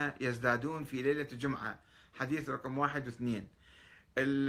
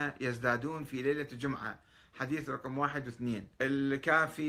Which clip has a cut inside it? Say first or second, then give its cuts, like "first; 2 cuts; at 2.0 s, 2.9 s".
second; 1 cut; at 3.5 s